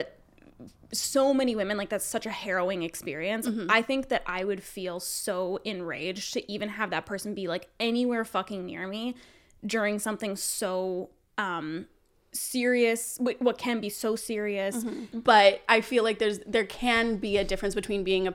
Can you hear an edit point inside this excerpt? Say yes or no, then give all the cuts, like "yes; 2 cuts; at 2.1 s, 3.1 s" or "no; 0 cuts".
yes; 1 cut; at 15.1 s